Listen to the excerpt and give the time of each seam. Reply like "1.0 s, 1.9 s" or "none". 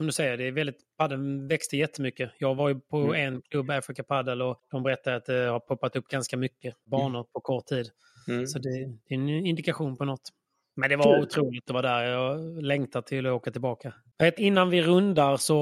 11.7 s, 14.4 s